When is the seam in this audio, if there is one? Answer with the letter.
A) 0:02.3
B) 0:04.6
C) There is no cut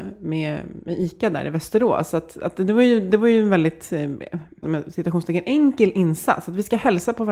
B